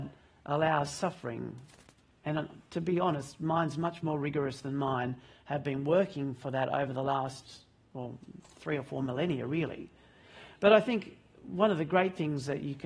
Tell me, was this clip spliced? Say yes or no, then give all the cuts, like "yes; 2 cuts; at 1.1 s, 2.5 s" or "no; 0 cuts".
no; 0 cuts